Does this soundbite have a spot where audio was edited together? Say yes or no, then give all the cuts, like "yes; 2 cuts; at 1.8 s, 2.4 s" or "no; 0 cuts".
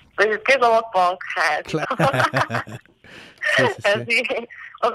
yes; 1 cut; at 1.8 s